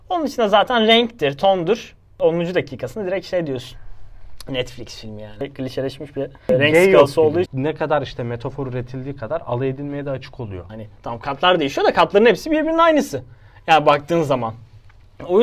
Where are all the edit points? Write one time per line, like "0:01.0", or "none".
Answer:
0:07.5
0:10.7